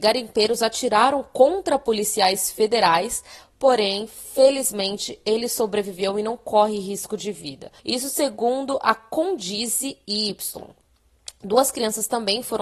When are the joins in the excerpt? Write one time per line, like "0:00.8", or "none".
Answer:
0:03.4
0:07.8